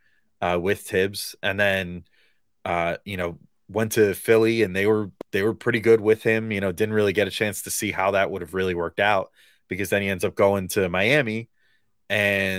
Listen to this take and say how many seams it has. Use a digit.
0